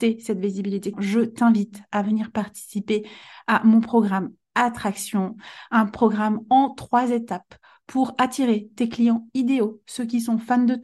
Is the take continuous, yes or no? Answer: no